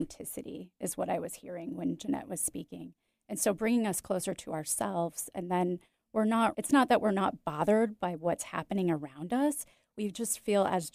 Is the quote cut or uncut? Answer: cut